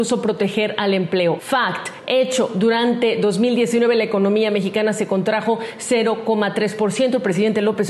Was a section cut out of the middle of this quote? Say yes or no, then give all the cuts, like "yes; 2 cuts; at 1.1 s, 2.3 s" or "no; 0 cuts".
yes; 1 cut; at 1.4 s